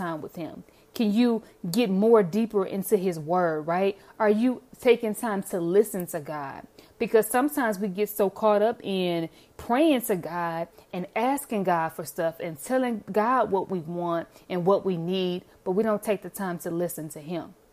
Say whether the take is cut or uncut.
uncut